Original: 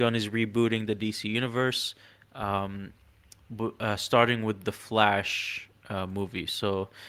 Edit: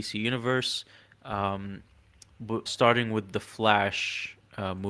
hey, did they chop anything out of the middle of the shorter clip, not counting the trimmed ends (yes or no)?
yes